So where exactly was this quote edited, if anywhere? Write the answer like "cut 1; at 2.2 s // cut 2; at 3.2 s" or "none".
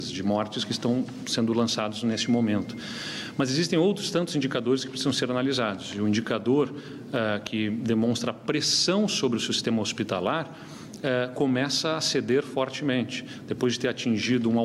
none